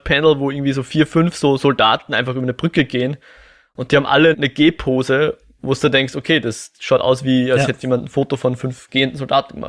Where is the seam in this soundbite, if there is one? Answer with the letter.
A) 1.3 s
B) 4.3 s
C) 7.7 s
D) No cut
B